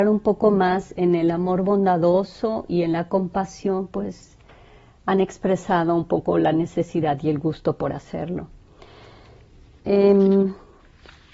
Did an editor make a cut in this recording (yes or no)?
no